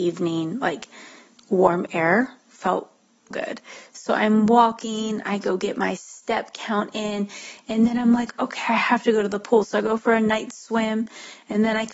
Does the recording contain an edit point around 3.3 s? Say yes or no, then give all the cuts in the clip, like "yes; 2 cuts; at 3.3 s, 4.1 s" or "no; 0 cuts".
yes; 1 cut; at 3.3 s